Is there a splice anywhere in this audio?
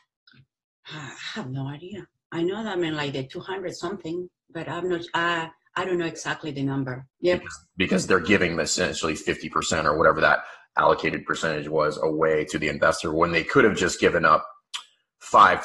yes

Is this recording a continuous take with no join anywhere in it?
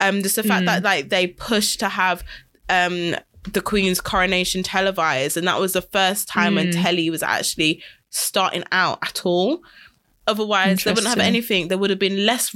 no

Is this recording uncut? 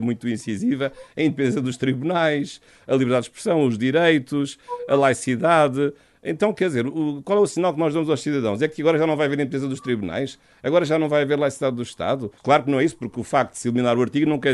no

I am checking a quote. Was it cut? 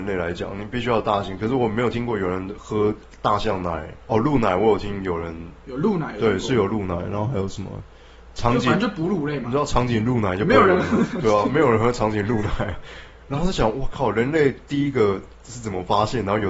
yes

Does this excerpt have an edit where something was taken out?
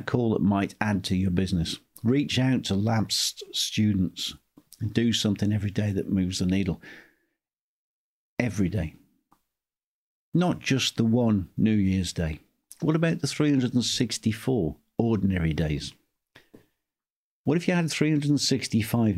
no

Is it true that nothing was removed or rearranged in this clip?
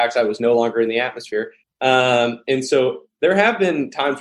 no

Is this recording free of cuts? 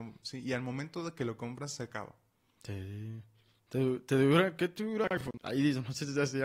no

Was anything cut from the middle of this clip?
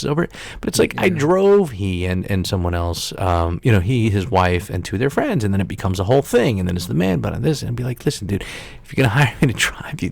no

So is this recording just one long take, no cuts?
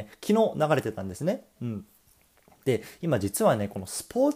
no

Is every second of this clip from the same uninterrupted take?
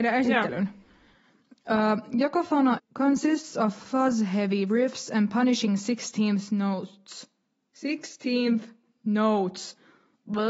no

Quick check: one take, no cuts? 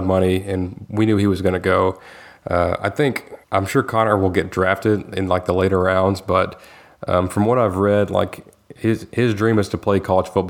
no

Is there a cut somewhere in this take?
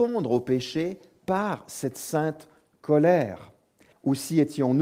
yes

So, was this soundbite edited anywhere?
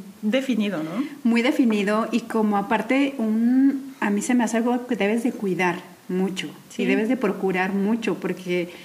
no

